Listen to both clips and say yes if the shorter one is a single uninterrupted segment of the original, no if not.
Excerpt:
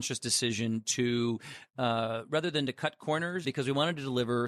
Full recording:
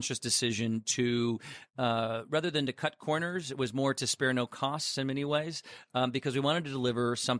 no